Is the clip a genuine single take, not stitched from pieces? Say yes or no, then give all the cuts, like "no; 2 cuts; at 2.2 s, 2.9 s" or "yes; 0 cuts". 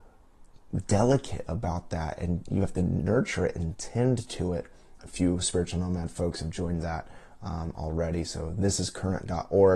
no; 1 cut; at 5.0 s